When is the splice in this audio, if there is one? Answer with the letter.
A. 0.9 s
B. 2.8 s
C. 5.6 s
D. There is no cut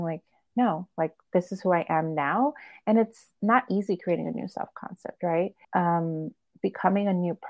C